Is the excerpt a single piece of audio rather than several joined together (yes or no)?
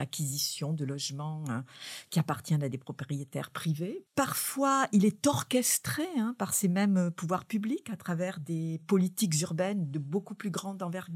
no